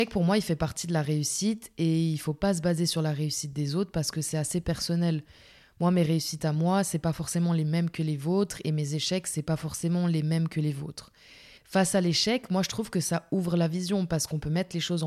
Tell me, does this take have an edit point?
yes; 1 cut; at 11.6 s

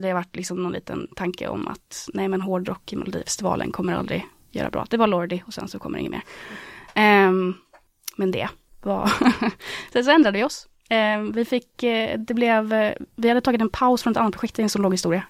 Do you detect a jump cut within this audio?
no; 0 cuts

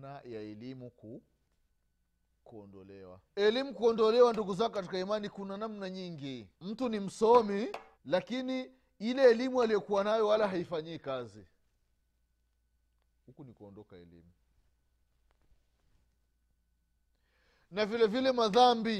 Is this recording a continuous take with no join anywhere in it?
no; 3 cuts; at 3.3 s, 6.5 s, 7.9 s

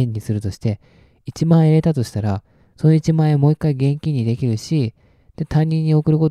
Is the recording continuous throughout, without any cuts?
yes; 0 cuts

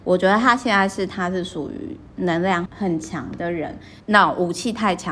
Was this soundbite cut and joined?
yes; 2 cuts; at 2.7 s, 4.0 s

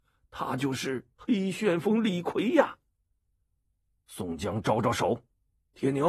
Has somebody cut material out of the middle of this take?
no; 0 cuts

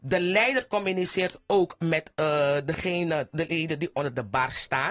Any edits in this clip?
no; 0 cuts

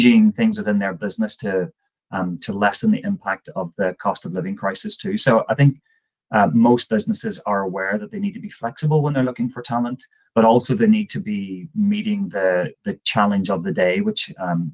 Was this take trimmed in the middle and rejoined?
no; 0 cuts

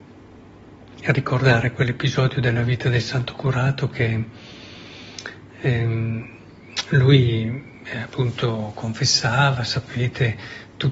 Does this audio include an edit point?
no; 0 cuts

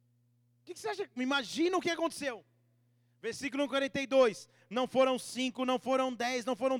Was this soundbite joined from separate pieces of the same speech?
no; 0 cuts

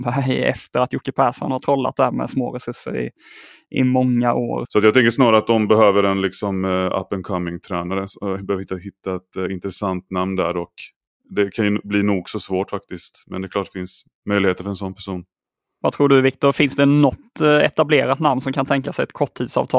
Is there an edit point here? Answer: yes; 1 cut; at 4.6 s

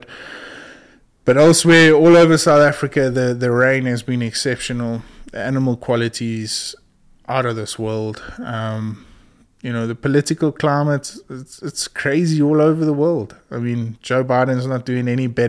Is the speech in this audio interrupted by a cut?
no; 0 cuts

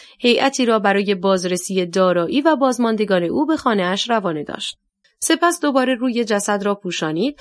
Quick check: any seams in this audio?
yes; 1 cut; at 5.0 s

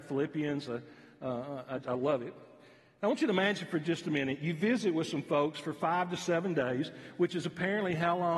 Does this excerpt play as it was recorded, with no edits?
no; 1 cut; at 1.8 s

